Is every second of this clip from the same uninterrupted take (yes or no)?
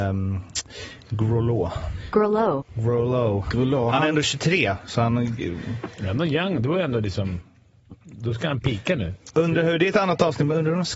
yes